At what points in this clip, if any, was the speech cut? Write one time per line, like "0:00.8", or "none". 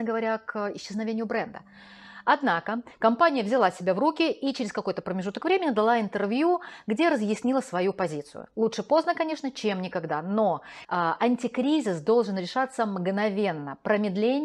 0:10.8